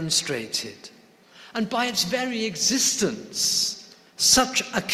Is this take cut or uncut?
uncut